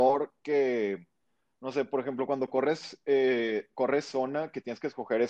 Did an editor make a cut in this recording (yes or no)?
no